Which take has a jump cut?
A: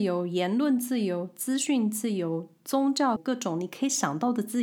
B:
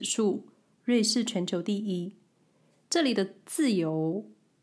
A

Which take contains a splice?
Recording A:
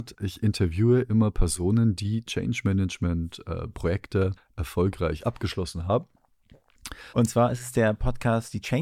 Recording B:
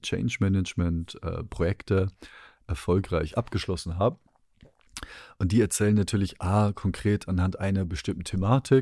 A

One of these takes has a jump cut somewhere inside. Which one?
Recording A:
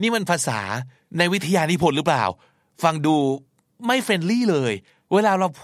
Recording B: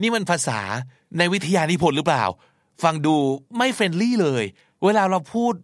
B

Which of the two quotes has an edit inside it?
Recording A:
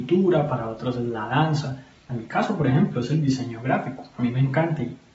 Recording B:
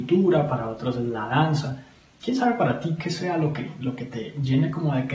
A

